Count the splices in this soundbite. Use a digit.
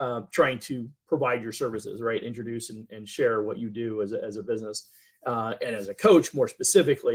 0